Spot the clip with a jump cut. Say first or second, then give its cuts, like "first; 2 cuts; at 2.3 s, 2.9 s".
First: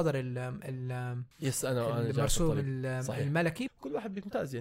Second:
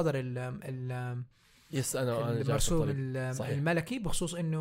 first; 2 cuts; at 1.3 s, 3.7 s